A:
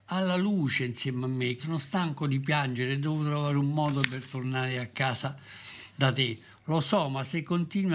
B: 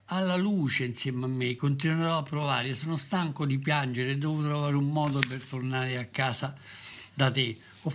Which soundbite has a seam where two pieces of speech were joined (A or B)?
A